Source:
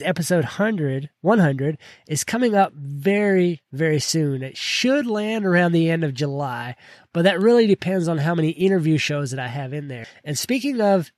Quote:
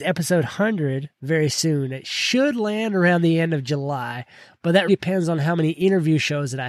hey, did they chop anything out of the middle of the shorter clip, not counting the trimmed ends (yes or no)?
yes